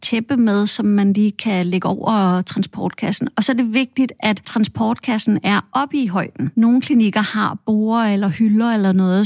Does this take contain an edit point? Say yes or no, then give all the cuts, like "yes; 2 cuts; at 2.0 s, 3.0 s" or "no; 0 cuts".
no; 0 cuts